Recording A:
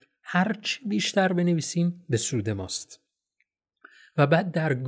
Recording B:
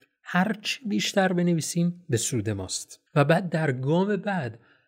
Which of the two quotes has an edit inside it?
B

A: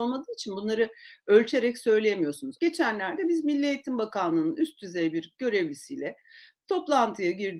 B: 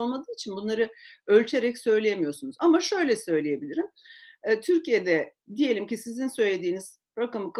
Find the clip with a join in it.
A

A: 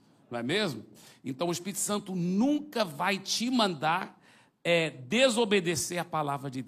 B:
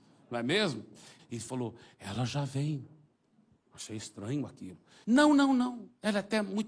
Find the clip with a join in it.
B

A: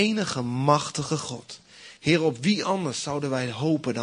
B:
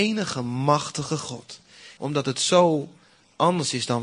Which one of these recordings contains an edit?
B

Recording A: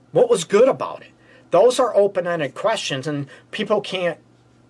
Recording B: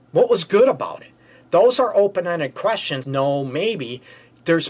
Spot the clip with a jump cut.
B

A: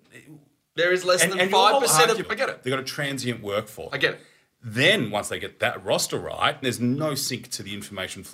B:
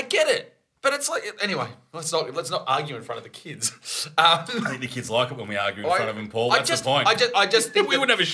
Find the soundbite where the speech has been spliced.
A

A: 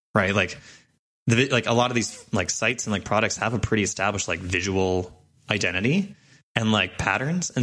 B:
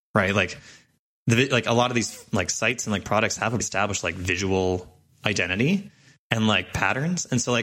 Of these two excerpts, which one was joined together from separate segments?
B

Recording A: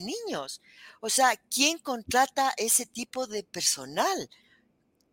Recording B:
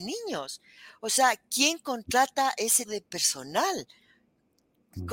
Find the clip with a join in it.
B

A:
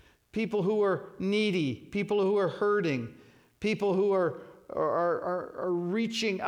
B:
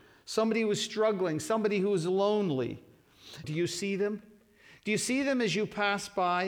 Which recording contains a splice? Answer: B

